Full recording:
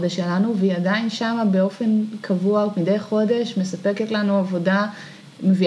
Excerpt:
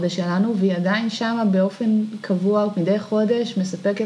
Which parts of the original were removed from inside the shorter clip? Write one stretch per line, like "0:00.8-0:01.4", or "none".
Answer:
none